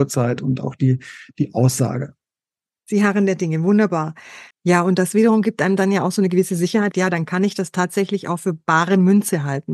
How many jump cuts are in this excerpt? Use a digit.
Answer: 3